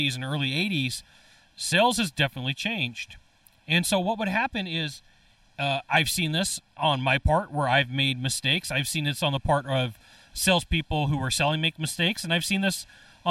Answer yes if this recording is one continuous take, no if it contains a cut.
yes